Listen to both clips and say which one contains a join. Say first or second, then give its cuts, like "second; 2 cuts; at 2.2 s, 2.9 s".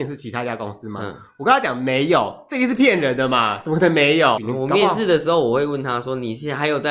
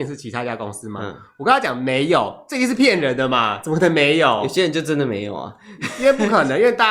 first; 1 cut; at 4.4 s